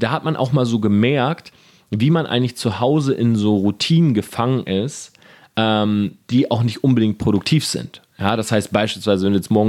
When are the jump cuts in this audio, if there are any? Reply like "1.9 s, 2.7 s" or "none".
none